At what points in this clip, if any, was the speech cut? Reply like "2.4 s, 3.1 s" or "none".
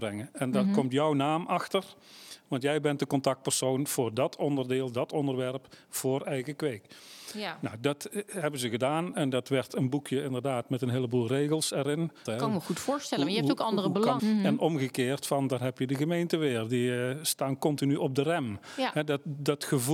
12.3 s, 14.2 s